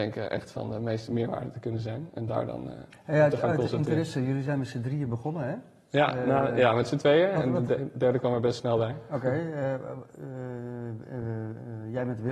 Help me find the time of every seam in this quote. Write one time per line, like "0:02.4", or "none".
none